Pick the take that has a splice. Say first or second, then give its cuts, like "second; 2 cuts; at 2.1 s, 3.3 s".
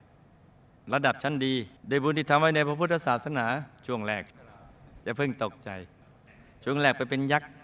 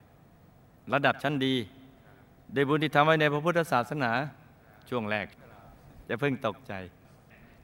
first; 2 cuts; at 1.8 s, 3.7 s